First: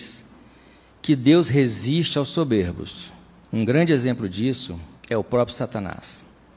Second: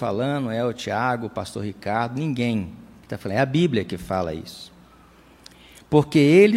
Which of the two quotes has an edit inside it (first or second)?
first